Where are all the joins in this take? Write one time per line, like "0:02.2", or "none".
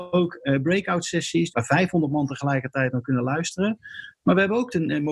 0:01.5